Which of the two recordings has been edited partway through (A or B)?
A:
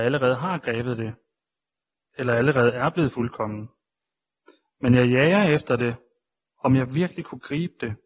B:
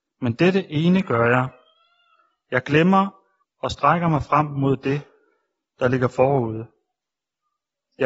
B